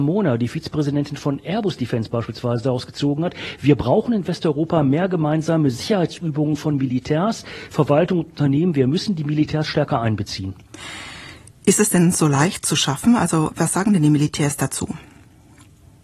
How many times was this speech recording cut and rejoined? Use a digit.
0